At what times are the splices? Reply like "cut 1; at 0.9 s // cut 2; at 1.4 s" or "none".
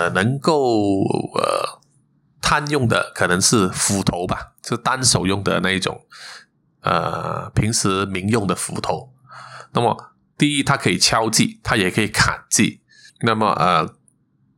cut 1; at 13.1 s